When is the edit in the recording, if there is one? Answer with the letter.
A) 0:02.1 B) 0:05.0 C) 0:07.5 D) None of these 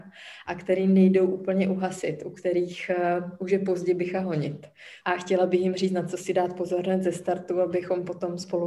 B